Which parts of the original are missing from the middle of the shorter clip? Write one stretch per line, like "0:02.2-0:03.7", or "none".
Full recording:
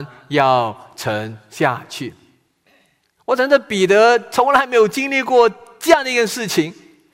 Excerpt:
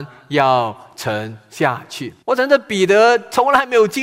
0:02.2-0:03.2